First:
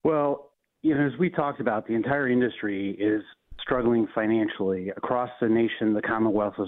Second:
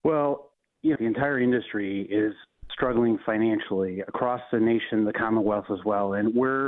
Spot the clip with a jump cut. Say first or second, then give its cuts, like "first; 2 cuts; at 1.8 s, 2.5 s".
second; 1 cut; at 0.9 s